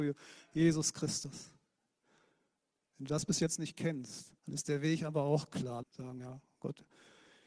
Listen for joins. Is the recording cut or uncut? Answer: cut